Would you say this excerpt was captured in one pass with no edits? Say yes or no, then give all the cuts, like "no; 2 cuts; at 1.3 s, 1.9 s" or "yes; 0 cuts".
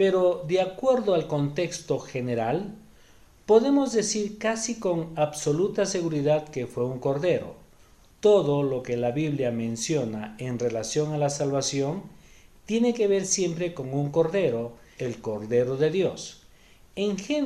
no; 1 cut; at 15.0 s